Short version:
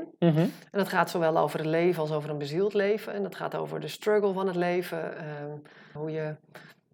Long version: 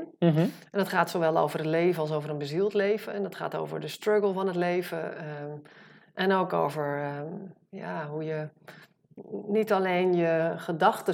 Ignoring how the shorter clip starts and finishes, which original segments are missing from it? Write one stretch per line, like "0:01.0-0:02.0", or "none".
0:06.0-0:08.1